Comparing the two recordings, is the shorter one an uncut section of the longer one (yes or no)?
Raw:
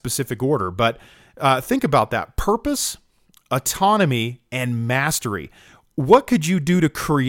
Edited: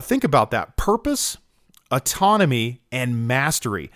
yes